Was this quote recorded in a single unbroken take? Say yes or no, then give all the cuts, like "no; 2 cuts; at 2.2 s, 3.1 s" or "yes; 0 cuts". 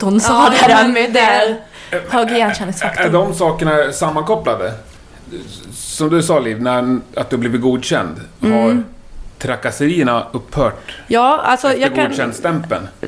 yes; 0 cuts